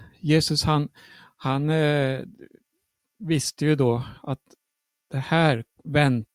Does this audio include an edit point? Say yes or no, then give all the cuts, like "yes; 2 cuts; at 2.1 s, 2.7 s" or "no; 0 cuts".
no; 0 cuts